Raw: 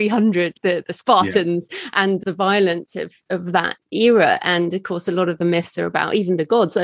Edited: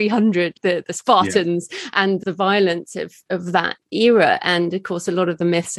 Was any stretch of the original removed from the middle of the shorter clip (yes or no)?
no